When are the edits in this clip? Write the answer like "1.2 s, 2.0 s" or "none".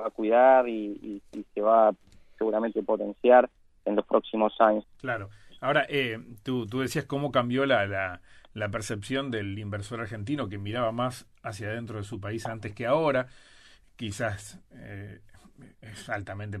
4.8 s

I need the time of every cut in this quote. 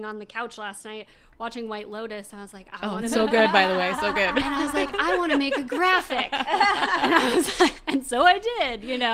none

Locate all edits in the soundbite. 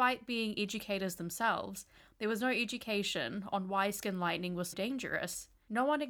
4.7 s

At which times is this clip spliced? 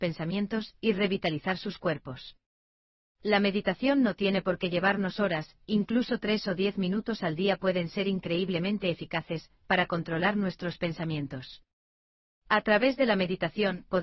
none

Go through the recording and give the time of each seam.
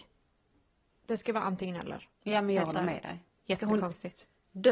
2.1 s

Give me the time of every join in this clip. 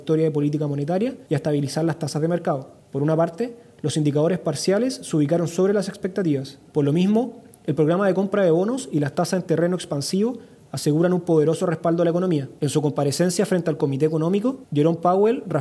2.8 s, 6.7 s, 12.6 s

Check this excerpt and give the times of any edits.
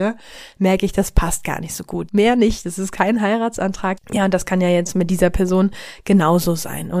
2.1 s, 4.0 s

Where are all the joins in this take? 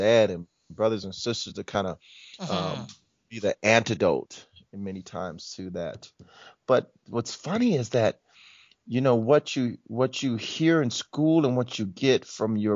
none

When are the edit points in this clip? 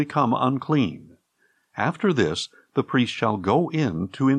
none

